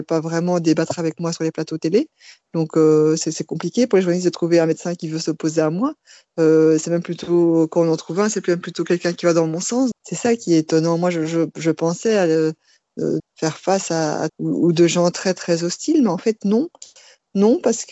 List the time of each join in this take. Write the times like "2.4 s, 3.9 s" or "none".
9.9 s, 13.2 s, 14.3 s